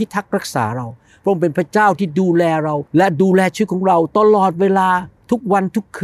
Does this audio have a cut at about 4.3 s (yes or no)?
no